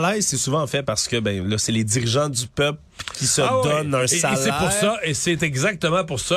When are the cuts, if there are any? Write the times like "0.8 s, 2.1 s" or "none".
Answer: none